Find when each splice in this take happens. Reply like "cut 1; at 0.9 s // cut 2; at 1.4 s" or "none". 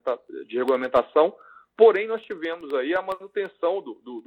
none